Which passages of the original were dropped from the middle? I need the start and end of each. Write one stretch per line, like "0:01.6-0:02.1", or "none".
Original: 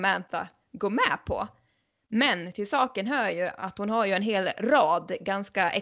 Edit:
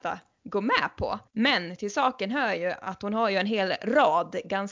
0:01.6-0:02.0